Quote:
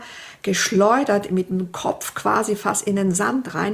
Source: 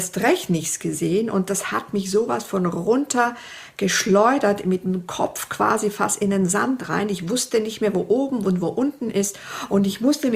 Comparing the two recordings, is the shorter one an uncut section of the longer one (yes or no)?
yes